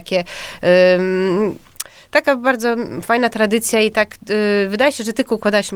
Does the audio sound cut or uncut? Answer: uncut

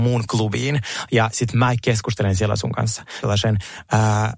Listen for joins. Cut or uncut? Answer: cut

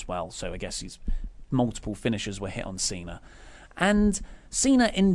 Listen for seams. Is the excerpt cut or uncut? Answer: uncut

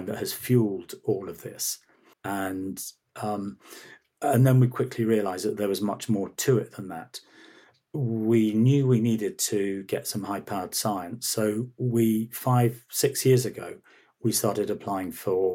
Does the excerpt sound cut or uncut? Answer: cut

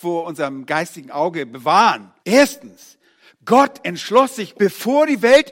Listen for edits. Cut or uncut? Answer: cut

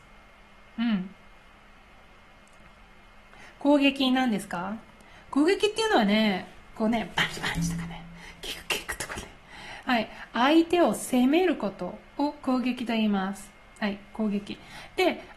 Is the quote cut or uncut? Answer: uncut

